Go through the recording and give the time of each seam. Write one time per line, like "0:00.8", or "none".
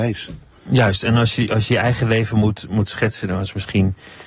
none